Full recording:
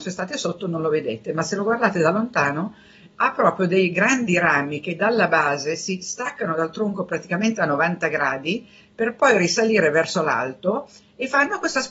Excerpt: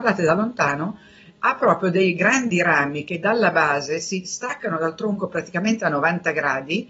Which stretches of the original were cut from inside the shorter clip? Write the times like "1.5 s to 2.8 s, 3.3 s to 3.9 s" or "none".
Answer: none